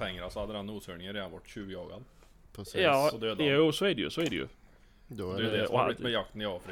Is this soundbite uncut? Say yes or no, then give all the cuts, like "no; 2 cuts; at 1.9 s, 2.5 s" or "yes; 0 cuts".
yes; 0 cuts